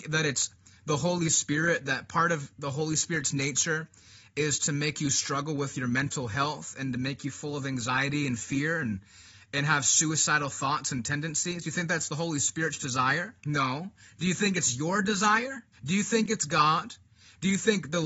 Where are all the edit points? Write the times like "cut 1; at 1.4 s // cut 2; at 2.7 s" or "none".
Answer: cut 1; at 13.4 s // cut 2; at 15.7 s